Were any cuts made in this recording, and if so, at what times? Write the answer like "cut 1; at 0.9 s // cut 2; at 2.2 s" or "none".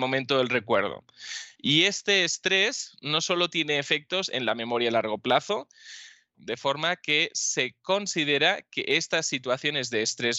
cut 1; at 1.6 s // cut 2; at 6.3 s